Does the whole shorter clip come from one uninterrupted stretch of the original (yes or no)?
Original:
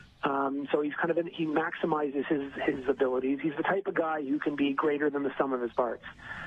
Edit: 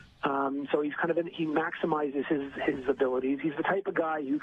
yes